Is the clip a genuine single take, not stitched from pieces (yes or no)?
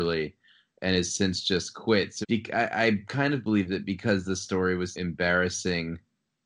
no